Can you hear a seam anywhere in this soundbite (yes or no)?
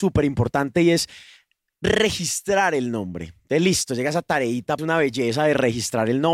yes